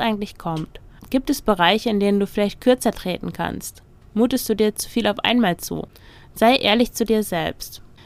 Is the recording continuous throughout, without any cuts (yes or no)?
no